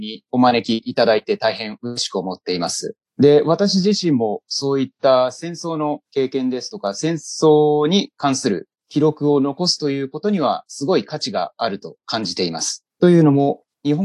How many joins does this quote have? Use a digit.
0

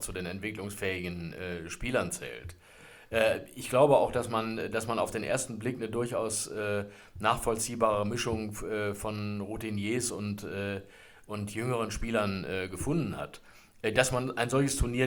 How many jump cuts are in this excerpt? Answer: 0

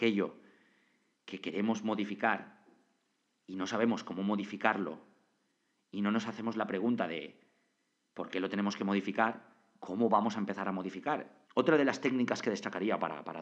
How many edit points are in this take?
1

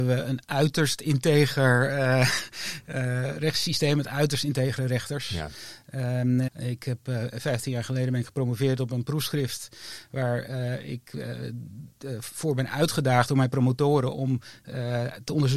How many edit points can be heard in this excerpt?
1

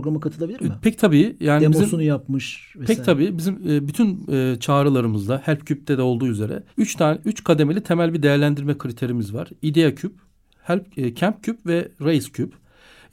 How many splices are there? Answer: 1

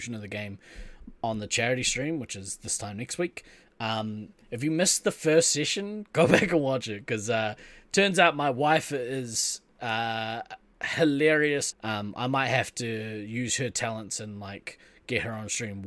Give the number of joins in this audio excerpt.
1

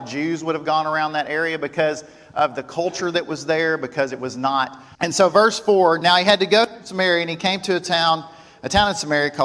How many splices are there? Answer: 2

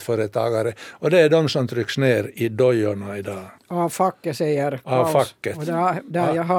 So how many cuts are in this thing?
1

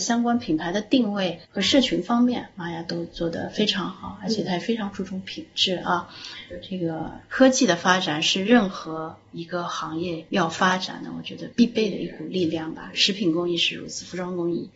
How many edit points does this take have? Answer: 1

